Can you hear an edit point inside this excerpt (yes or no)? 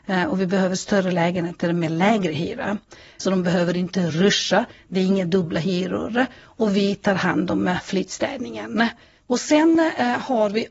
yes